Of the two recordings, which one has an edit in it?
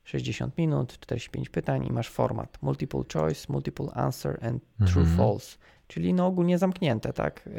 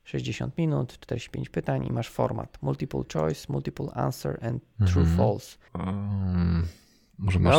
second; 1 cut; at 5.7 s

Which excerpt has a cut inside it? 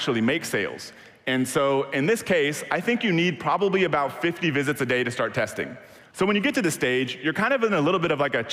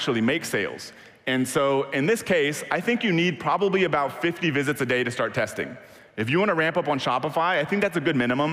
first; 1 cut; at 6.0 s

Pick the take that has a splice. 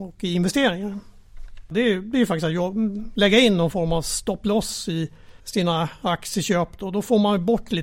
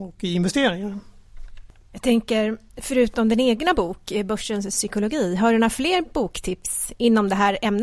first; 2 cuts; at 1.7 s, 5.4 s

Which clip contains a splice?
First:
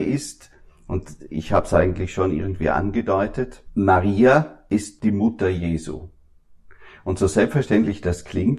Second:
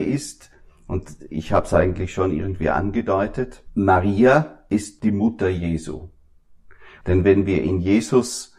second; 1 cut; at 7.0 s

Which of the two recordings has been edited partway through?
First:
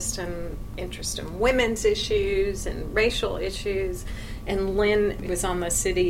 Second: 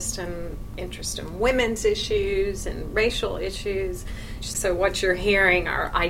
second; 1 cut; at 4.4 s

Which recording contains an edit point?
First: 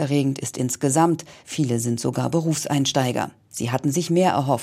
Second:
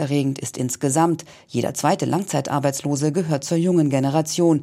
first; 2 cuts; at 1.4 s, 3.5 s

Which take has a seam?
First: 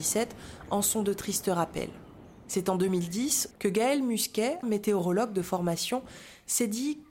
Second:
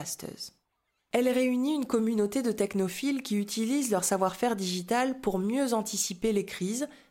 first; 2 cuts; at 3.5 s, 4.6 s

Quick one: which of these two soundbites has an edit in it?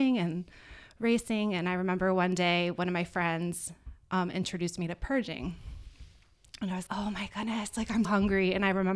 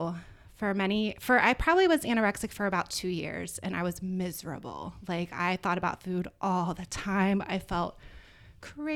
first; 2 cuts; at 6.9 s, 8.0 s

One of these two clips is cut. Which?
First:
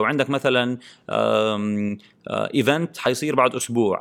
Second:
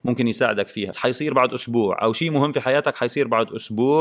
second; 1 cut; at 0.9 s

